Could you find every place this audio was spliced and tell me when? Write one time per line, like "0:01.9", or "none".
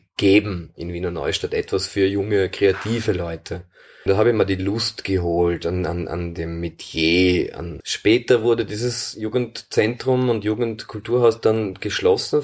0:04.1
0:07.8

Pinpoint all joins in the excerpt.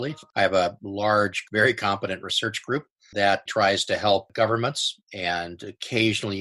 0:01.4
0:03.5

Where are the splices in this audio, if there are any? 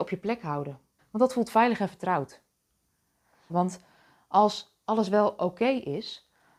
0:01.0
0:03.5

